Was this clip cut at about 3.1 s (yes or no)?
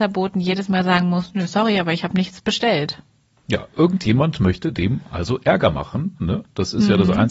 no